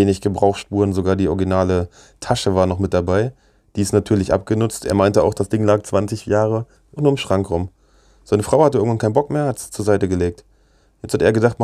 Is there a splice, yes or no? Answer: yes